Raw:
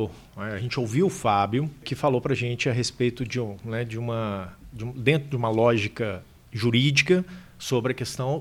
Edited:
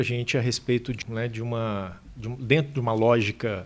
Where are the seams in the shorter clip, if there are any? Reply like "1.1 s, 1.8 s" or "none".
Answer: 1.0 s

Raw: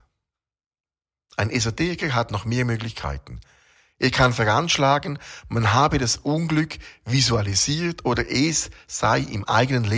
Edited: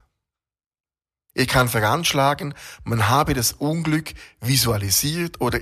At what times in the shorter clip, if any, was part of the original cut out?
1.3 s

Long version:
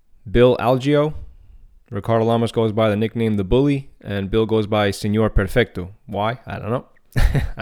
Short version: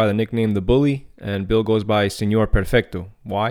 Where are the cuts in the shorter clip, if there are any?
none

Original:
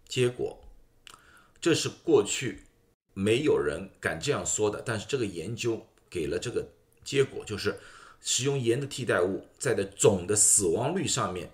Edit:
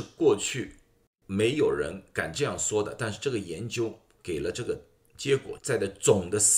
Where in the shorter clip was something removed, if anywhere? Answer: 5.6 s

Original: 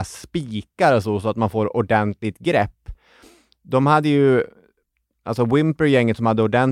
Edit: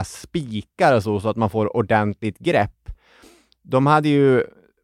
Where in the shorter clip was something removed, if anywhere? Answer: none

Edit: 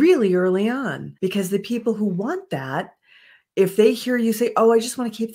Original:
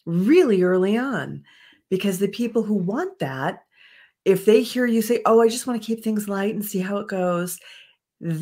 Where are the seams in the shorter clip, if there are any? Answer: 1.2 s

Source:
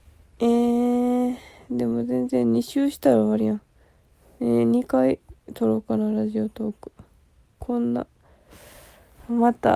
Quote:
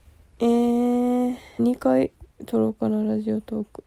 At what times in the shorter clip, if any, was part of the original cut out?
1.6 s

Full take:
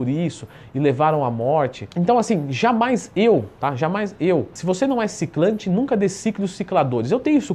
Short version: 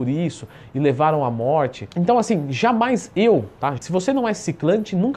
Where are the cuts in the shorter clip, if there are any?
3.8 s

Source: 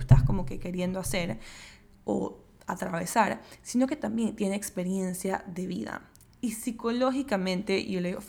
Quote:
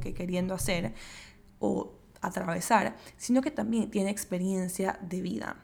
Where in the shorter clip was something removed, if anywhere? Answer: none

